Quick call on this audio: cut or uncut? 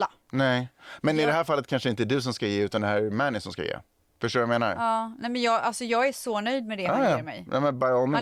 uncut